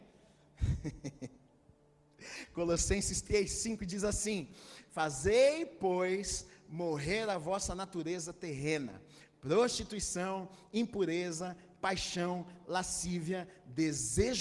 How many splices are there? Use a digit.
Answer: 0